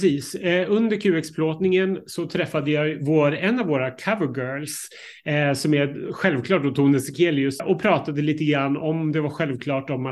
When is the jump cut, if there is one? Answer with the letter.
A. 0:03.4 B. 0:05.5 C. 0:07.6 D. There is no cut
C